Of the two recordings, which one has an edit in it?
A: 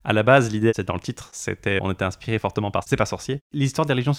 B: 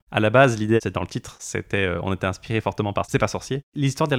A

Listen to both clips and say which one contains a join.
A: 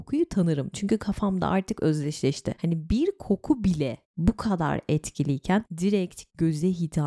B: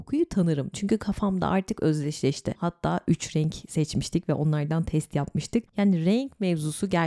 B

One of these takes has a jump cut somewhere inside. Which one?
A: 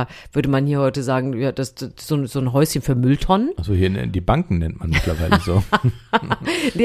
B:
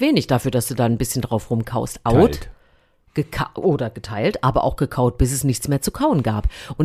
B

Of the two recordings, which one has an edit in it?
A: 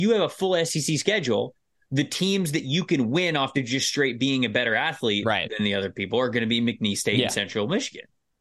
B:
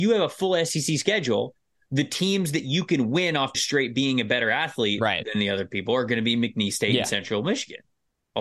B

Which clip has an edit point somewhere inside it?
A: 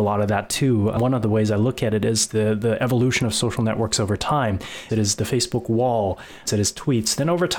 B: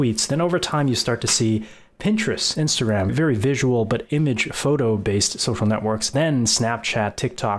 A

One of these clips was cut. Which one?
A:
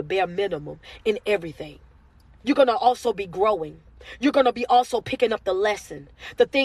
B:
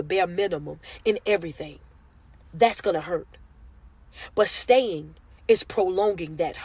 A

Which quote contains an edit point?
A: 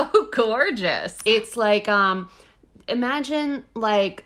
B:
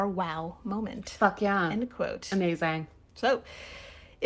A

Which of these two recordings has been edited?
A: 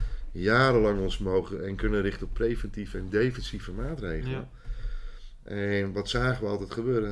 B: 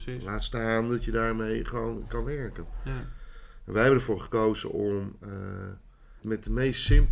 B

